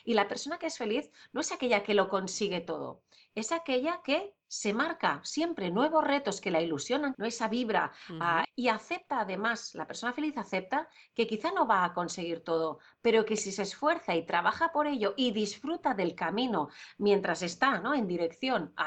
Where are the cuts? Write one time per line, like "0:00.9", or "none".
0:07.1
0:08.4